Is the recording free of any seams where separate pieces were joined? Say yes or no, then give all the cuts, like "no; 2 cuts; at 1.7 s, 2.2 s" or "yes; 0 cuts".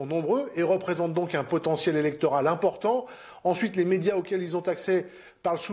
yes; 0 cuts